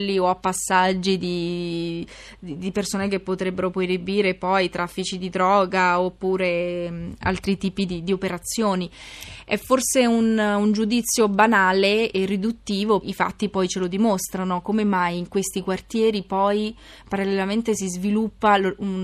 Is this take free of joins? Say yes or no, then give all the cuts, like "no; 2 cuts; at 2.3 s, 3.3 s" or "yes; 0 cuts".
no; 1 cut; at 13.0 s